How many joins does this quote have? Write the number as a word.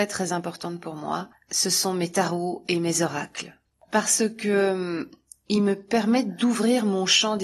zero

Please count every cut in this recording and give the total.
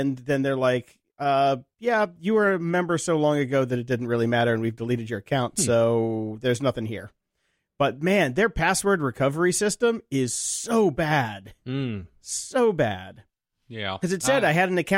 zero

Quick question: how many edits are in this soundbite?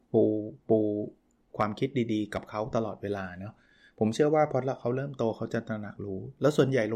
zero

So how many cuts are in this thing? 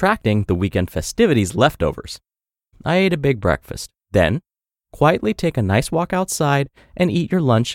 two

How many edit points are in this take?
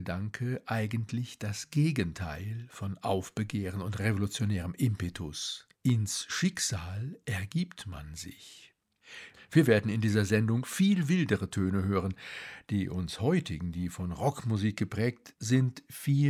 two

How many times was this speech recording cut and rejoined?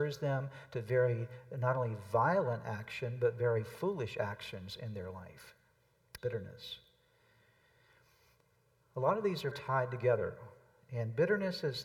two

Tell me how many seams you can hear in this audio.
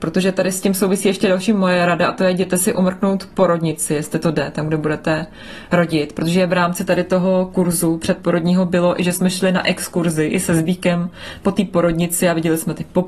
zero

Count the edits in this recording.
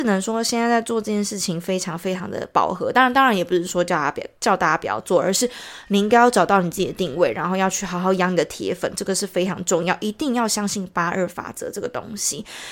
zero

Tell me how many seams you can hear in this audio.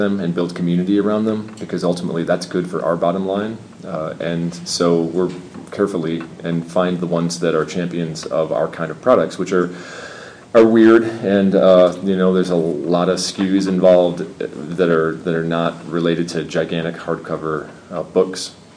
one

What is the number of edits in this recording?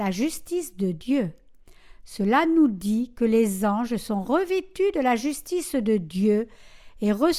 zero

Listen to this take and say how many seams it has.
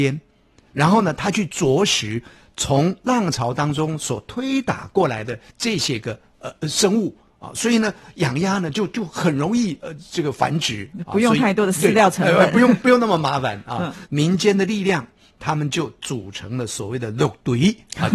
one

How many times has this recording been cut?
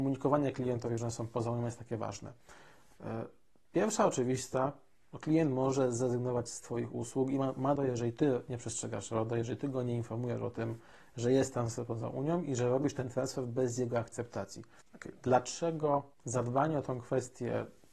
three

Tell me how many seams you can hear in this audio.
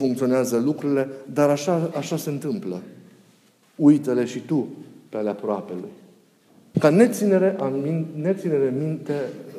two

